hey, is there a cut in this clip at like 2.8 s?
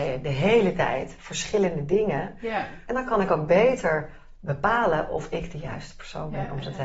yes; 1 cut; at 2.8 s

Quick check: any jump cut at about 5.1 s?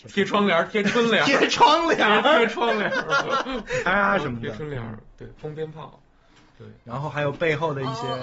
no; 1 cut; at 3.9 s

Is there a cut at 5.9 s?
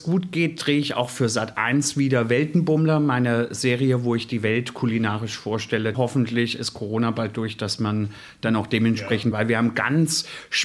yes; 2 cuts; at 5.9 s, 9.3 s

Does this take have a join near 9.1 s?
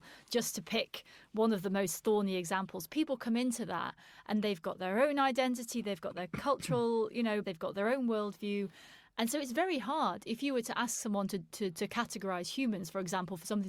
no; 1 cut; at 7.4 s

